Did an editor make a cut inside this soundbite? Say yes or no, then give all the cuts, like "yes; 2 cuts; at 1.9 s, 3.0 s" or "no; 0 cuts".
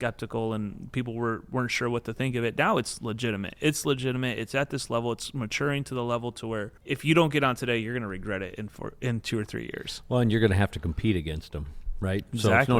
yes; 1 cut; at 6.8 s